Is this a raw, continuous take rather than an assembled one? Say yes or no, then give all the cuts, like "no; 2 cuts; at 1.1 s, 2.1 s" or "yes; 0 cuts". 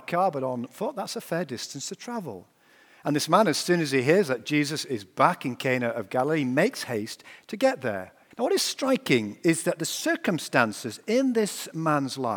no; 1 cut; at 8.3 s